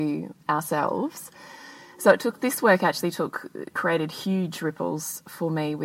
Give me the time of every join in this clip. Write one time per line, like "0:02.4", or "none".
0:03.7